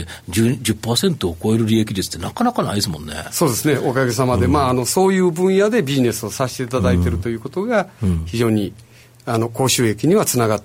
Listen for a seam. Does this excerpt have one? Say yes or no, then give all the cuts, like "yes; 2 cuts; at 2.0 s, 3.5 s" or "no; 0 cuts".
no; 0 cuts